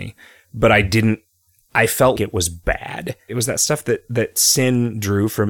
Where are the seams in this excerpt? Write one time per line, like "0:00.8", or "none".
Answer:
0:02.2
0:03.3